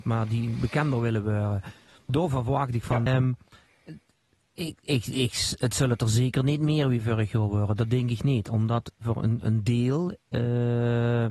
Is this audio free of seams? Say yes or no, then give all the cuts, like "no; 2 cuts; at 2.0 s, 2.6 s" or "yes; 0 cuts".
no; 1 cut; at 3.1 s